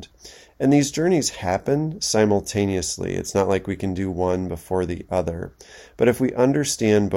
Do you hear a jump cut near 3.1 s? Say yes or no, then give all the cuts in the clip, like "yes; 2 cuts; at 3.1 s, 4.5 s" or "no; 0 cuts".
no; 0 cuts